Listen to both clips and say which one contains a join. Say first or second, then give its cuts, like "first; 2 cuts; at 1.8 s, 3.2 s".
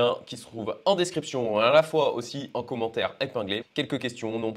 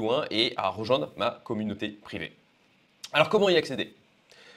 first; 1 cut; at 3.6 s